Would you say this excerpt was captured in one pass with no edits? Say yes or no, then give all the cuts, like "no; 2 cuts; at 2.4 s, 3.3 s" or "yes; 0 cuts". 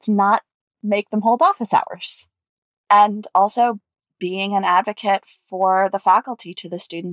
yes; 0 cuts